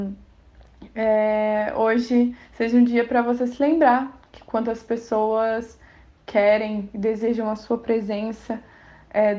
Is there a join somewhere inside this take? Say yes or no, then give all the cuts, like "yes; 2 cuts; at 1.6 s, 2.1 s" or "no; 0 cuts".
no; 0 cuts